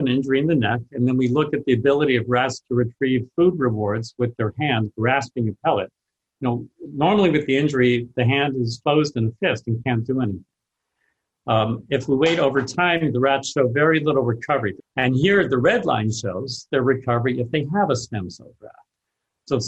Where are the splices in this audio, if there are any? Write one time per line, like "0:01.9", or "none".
0:08.8
0:14.8